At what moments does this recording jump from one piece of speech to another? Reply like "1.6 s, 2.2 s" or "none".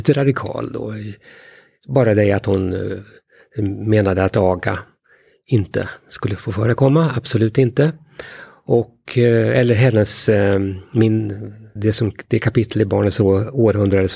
11.8 s